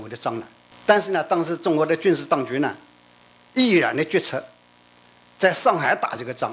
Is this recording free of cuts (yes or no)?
yes